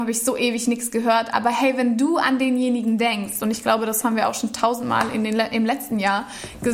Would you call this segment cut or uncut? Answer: uncut